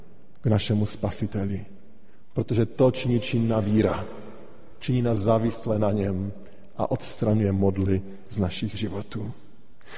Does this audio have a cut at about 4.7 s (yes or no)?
no